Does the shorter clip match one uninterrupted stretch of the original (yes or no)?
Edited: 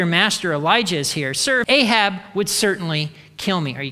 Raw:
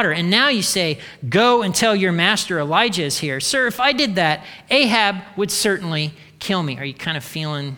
no